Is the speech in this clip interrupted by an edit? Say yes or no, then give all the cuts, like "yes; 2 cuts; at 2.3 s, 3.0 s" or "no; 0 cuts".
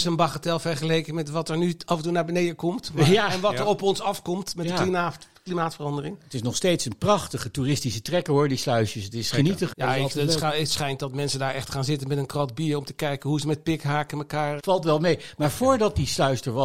yes; 2 cuts; at 9.7 s, 14.6 s